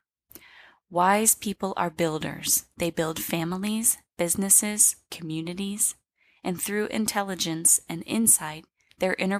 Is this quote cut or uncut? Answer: uncut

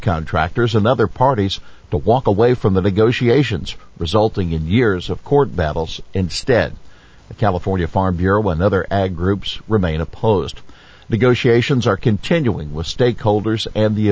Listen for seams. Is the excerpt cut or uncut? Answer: uncut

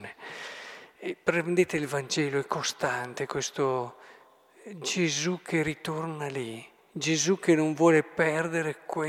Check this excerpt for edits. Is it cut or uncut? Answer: uncut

